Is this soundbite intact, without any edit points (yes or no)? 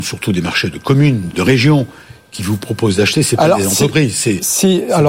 no